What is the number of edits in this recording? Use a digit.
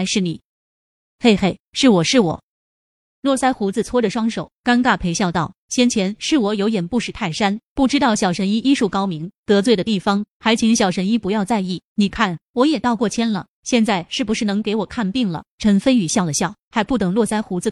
1